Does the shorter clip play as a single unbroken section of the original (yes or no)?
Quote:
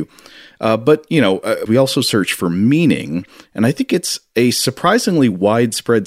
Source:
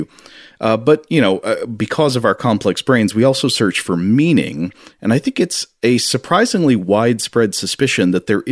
no